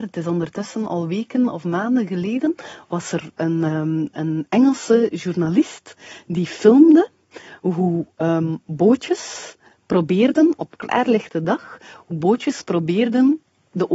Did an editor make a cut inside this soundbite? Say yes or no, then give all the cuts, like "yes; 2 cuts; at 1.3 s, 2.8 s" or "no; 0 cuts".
no; 0 cuts